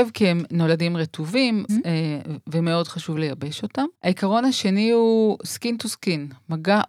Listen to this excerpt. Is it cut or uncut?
cut